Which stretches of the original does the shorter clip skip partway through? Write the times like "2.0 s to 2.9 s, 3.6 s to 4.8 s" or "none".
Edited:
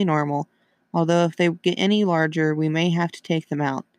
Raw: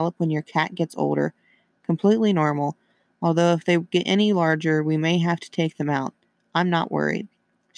none